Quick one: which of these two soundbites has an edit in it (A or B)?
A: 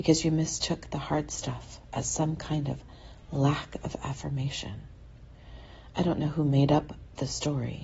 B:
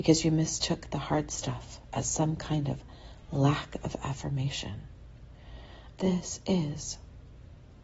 B